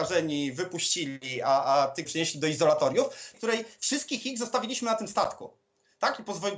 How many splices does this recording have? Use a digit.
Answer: 2